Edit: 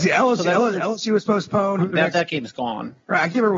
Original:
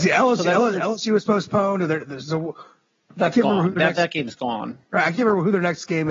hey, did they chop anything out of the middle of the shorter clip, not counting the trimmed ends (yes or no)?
yes